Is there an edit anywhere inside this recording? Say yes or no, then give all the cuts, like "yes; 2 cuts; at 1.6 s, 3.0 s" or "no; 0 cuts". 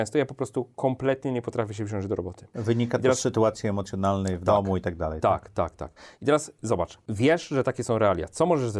no; 0 cuts